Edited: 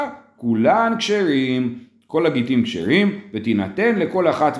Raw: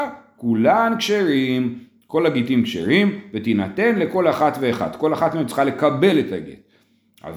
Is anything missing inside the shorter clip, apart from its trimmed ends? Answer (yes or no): no